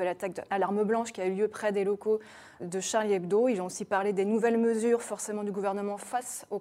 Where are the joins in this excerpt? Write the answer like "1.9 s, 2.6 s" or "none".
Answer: 2.6 s